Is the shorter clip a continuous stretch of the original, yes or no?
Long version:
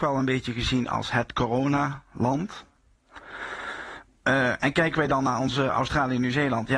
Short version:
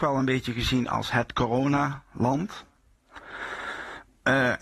yes